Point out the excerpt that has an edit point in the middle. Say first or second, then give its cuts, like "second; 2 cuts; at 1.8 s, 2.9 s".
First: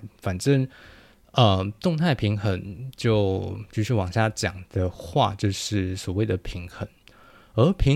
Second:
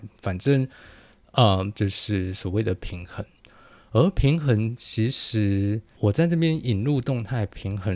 second; 2 cuts; at 1.7 s, 6.0 s